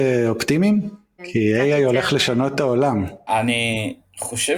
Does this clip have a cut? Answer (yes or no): yes